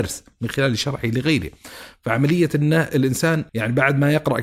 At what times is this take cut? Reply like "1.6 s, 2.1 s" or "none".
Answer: 3.5 s